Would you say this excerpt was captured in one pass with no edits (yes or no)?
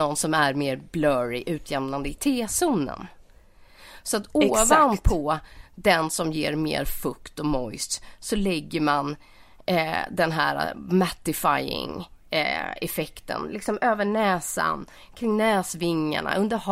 yes